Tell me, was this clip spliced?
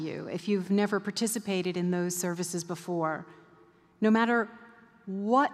no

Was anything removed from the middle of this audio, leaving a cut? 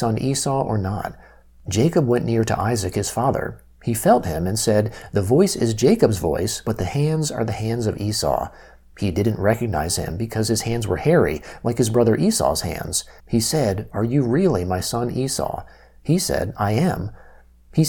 yes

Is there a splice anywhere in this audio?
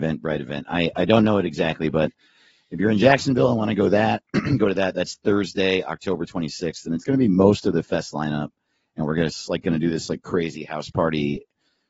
no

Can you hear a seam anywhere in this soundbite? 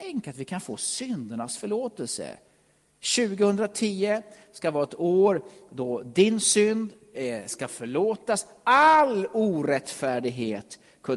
no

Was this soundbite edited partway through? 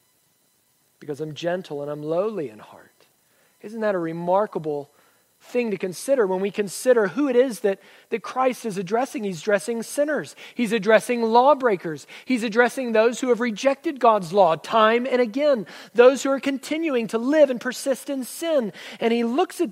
no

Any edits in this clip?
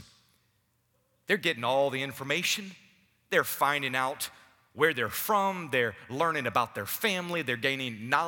no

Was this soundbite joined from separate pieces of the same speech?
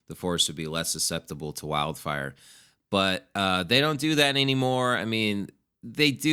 no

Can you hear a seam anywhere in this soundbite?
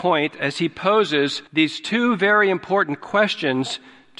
yes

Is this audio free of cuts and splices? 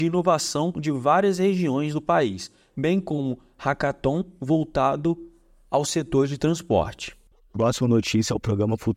yes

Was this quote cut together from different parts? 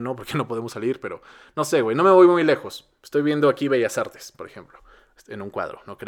no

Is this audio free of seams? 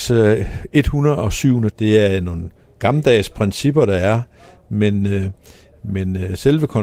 no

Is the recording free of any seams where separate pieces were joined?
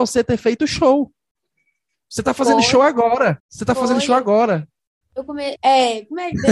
no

